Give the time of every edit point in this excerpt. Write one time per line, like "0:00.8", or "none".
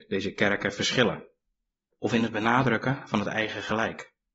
0:01.9